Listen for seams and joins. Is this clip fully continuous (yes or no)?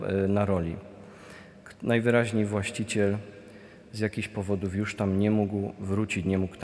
yes